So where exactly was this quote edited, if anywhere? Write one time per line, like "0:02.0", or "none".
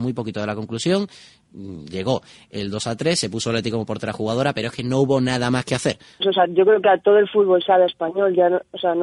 0:06.2